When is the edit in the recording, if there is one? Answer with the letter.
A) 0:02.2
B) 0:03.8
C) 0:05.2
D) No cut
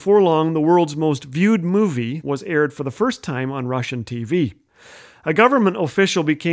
A